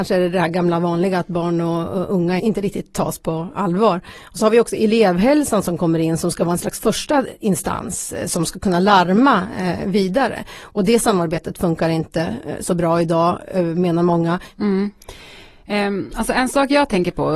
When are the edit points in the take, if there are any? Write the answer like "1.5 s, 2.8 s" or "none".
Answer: 2.4 s, 4.1 s